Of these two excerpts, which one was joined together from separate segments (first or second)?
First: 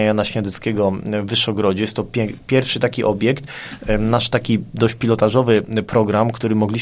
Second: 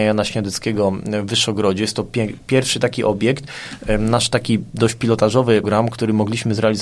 second